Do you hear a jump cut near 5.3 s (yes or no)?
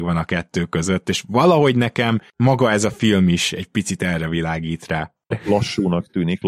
yes